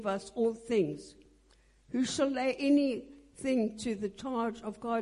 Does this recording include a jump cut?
no; 0 cuts

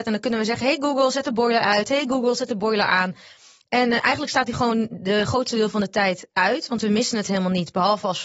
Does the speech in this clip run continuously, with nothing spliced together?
yes; 0 cuts

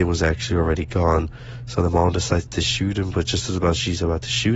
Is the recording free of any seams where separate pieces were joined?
yes; 0 cuts

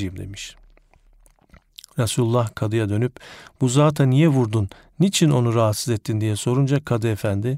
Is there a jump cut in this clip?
no; 0 cuts

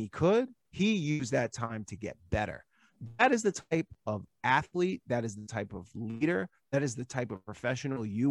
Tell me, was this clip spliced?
no; 0 cuts

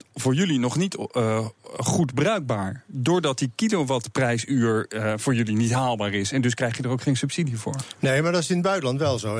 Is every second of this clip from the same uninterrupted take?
yes; 0 cuts

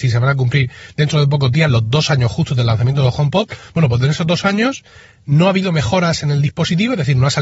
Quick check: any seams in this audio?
no; 0 cuts

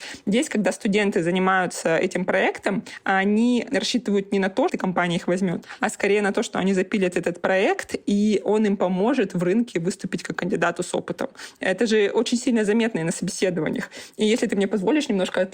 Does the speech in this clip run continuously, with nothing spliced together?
no; 1 cut; at 4.7 s

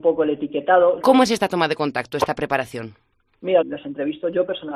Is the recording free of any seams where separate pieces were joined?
no; 2 cuts; at 1.0 s, 3.6 s

